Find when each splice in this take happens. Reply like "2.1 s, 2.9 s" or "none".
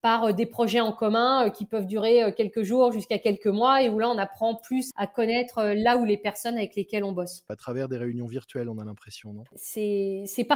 4.9 s, 7.5 s